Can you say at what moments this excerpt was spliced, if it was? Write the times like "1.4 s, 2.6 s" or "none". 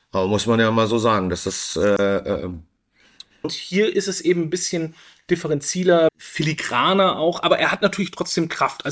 3.4 s, 6.1 s